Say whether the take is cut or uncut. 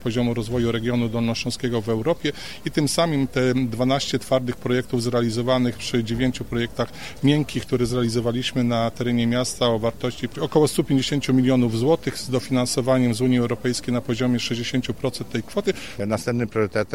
cut